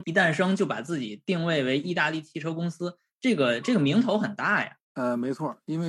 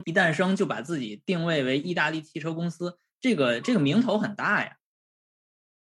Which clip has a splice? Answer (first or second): first